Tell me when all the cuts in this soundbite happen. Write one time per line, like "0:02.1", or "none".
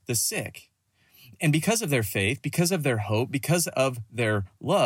none